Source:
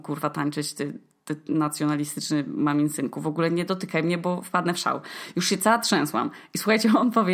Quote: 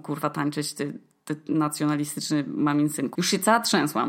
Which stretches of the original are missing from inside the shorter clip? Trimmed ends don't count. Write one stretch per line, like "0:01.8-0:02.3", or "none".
0:03.1-0:05.3